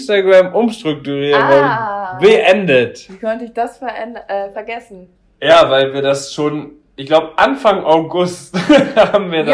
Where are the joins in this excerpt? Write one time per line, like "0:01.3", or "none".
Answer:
none